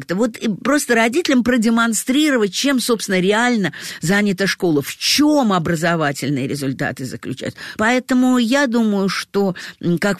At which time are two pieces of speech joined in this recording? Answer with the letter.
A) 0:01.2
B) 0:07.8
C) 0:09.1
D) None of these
B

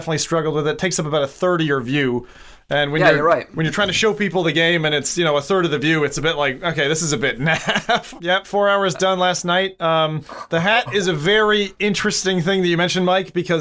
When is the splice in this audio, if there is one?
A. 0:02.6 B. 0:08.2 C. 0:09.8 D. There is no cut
B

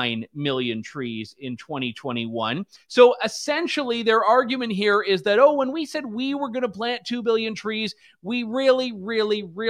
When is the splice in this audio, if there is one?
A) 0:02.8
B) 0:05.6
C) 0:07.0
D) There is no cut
A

